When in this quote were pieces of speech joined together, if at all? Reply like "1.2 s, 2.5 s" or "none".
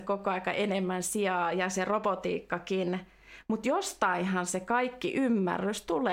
none